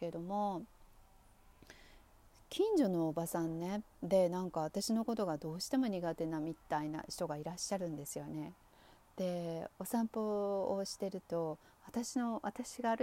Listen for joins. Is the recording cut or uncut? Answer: uncut